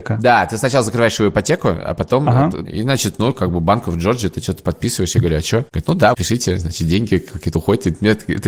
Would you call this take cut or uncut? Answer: cut